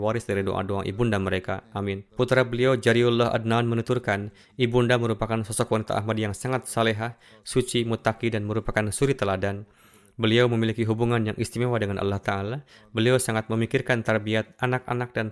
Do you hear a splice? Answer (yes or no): yes